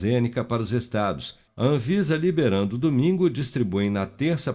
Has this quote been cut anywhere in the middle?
yes; 1 cut; at 1.5 s

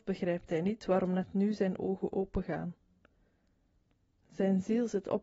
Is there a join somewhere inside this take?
no; 0 cuts

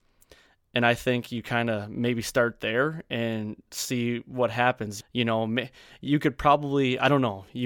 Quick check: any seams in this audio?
yes; 1 cut; at 5.0 s

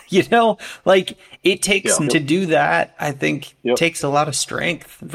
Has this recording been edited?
yes; 1 cut; at 2.1 s

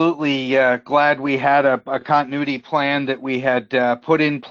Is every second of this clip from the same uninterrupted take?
yes; 0 cuts

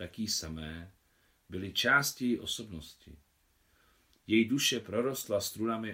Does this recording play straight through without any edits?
yes; 0 cuts

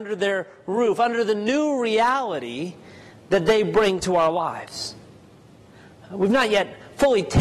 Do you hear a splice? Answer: no; 0 cuts

